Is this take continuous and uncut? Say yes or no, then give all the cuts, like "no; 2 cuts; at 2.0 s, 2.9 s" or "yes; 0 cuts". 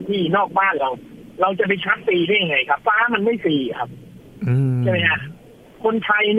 no; 1 cut; at 2.8 s